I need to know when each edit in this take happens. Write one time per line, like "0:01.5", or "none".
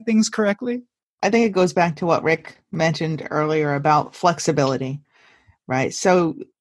0:01.0